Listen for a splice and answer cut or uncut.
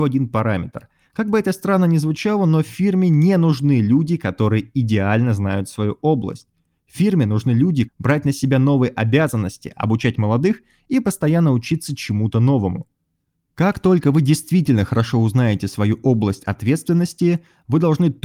cut